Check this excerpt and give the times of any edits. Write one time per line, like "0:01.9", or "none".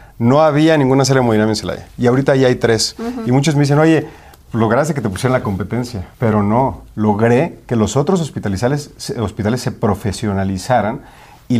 0:06.1